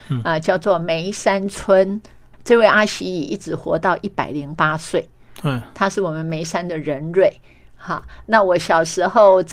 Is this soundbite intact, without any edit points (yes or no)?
no